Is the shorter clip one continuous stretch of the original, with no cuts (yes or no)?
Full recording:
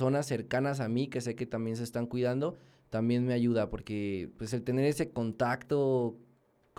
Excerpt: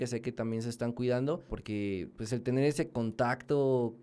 no